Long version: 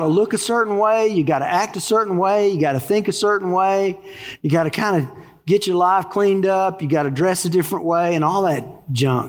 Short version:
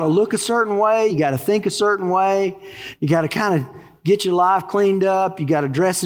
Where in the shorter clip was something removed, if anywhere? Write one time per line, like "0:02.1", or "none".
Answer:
0:01.1